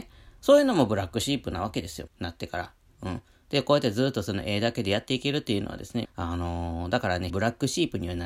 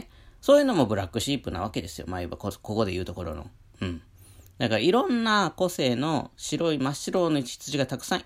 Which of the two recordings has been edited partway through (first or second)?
first